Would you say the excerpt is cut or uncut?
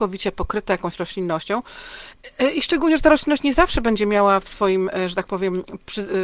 uncut